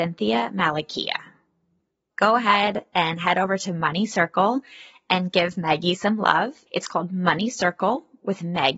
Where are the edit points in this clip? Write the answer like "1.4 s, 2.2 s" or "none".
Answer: 2.1 s, 6.7 s